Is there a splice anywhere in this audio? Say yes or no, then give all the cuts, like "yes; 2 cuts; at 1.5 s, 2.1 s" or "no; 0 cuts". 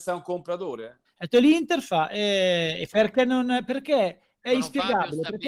yes; 2 cuts; at 1.0 s, 2.9 s